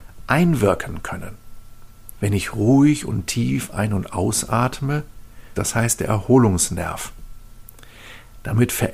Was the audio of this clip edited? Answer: yes; 2 cuts; at 2.1 s, 5.5 s

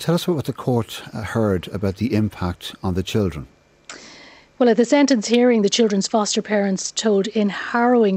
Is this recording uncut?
yes; 0 cuts

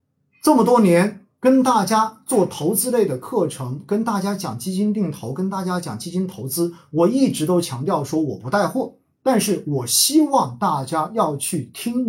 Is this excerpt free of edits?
yes; 0 cuts

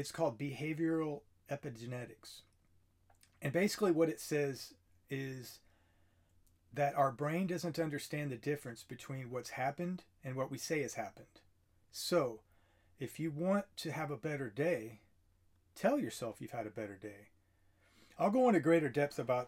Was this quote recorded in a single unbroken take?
yes; 0 cuts

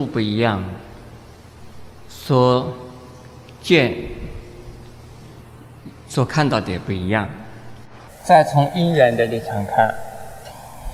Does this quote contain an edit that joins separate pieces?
no; 0 cuts

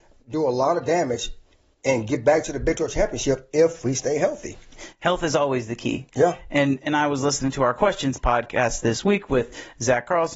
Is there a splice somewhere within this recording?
no; 0 cuts

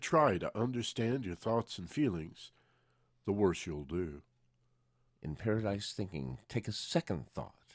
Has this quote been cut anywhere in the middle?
yes; 1 cut; at 5.1 s

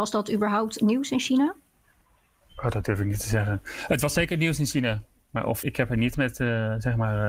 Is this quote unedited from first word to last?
no; 1 cut; at 5.6 s

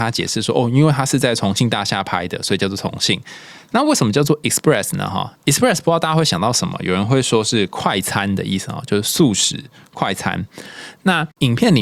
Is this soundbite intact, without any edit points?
yes; 0 cuts

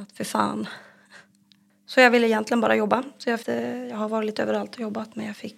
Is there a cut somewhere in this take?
yes; 1 cut; at 3.4 s

